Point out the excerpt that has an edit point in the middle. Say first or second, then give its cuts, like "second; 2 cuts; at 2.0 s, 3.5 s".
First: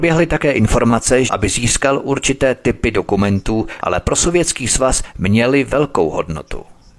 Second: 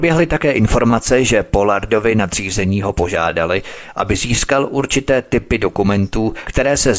first; 2 cuts; at 1.3 s, 3.8 s